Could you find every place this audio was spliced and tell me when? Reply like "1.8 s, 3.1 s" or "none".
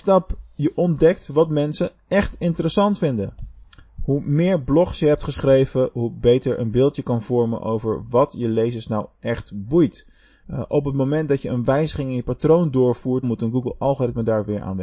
10.4 s, 13.2 s